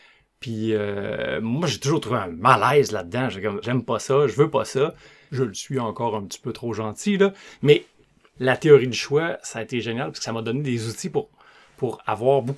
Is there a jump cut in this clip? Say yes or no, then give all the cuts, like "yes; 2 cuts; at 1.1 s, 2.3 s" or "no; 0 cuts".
yes; 2 cuts; at 3.6 s, 5.3 s